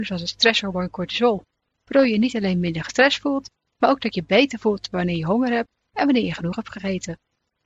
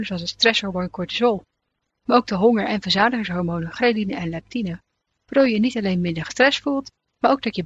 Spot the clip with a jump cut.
first; 1 cut; at 1.7 s

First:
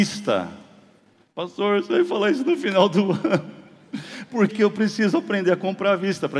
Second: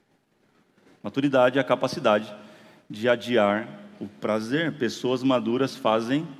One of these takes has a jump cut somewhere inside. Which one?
first; 1 cut; at 4.5 s

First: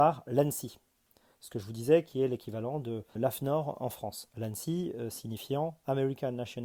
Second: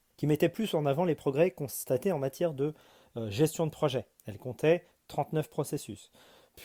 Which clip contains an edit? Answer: first; 1 cut; at 3.2 s

